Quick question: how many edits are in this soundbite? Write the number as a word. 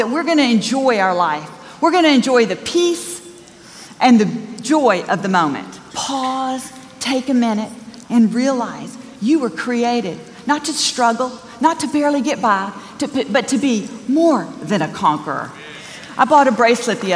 two